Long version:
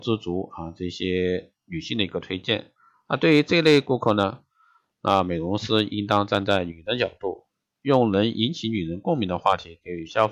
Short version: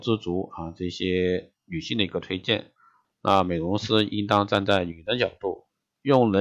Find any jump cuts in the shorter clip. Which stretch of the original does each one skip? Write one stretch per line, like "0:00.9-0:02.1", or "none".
0:03.0-0:04.8